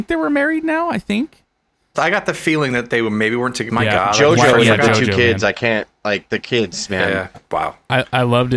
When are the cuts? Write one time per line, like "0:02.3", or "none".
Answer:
0:01.9
0:03.7
0:07.3